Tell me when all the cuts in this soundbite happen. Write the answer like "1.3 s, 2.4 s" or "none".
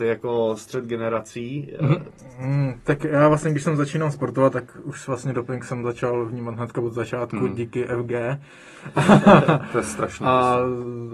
none